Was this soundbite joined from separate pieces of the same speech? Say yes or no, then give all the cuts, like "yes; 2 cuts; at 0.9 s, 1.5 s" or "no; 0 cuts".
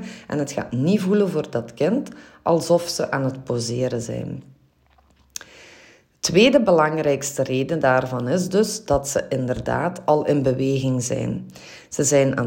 no; 0 cuts